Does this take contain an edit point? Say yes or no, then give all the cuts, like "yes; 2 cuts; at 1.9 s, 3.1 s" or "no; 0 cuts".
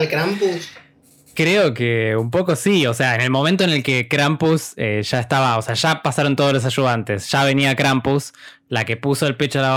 no; 0 cuts